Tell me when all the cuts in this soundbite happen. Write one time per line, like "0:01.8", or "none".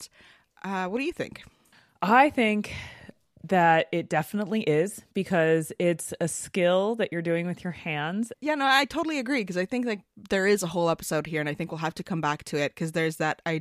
0:08.3